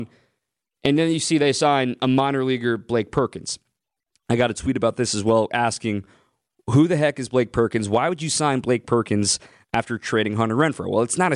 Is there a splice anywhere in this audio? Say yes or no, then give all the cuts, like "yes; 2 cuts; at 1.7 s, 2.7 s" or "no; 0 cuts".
no; 0 cuts